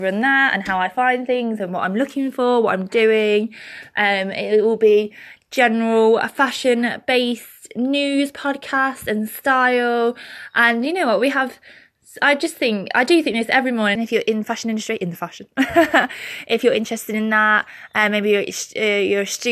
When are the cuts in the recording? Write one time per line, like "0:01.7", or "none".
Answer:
0:14.0